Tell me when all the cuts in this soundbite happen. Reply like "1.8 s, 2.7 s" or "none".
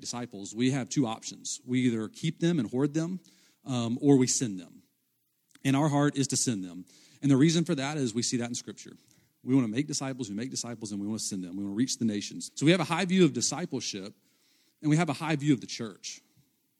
12.5 s